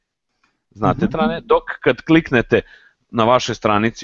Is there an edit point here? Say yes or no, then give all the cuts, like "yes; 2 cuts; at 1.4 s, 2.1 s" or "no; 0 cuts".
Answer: yes; 1 cut; at 1.1 s